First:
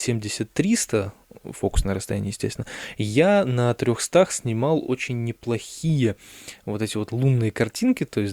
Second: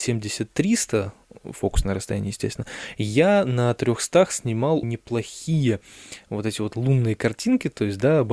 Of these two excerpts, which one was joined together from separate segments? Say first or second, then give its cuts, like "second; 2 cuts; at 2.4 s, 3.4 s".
second; 1 cut; at 4.8 s